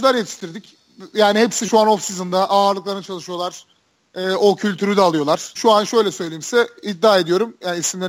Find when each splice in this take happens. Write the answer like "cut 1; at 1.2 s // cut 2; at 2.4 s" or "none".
cut 1; at 5.6 s